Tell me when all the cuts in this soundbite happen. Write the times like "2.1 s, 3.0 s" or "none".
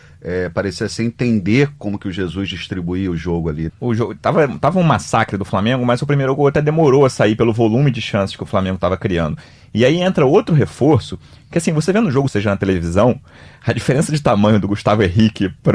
3.7 s, 12.3 s